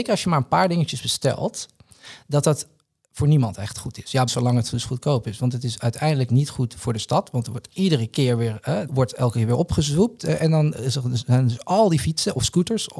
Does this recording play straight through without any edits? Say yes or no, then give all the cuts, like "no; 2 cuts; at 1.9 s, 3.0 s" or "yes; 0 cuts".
no; 2 cuts; at 4.3 s, 8.9 s